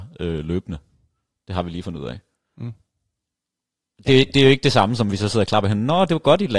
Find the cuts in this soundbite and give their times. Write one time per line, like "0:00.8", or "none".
none